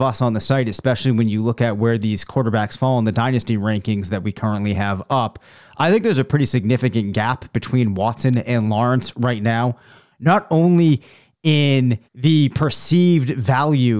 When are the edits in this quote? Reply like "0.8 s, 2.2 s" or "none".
12.0 s